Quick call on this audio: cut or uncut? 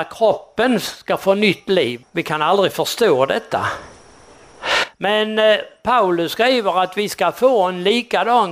cut